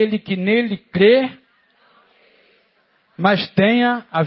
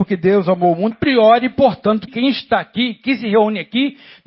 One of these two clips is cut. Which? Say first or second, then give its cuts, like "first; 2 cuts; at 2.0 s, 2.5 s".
second; 2 cuts; at 0.9 s, 2.1 s